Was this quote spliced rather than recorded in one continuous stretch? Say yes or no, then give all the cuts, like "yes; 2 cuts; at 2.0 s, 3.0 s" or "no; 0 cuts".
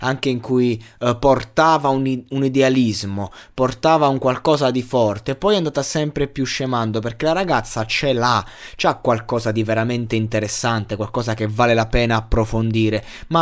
no; 0 cuts